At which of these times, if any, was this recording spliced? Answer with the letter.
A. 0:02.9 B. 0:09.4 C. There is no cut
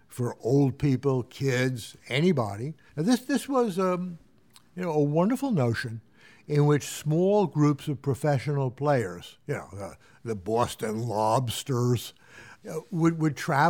A